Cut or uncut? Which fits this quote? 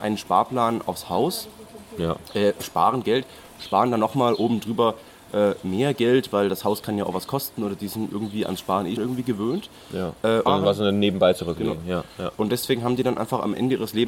cut